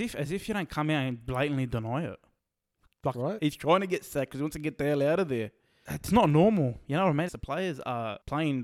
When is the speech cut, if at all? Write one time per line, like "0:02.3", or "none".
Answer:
0:03.4
0:07.3